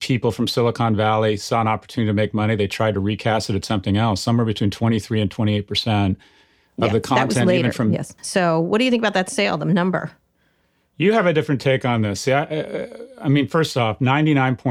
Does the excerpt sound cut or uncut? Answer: cut